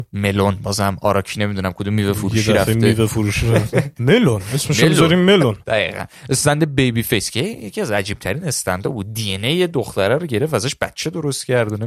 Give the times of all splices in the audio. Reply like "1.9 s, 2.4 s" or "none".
3.9 s